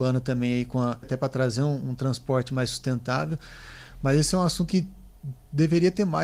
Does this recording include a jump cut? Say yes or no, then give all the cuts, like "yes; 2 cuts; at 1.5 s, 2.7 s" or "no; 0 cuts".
yes; 2 cuts; at 1.0 s, 4.7 s